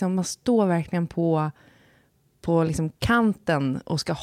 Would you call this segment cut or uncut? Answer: uncut